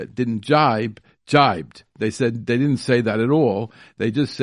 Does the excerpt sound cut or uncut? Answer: uncut